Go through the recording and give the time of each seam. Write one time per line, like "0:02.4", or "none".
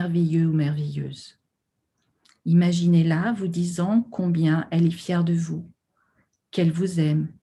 none